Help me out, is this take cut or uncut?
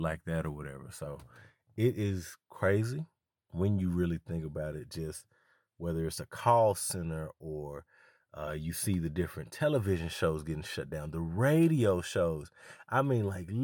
uncut